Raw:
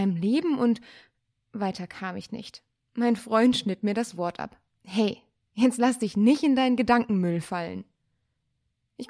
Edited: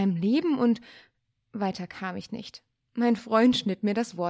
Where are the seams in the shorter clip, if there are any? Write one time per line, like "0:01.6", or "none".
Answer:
none